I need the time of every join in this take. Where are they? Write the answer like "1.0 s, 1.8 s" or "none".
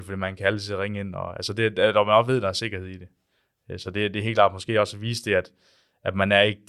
none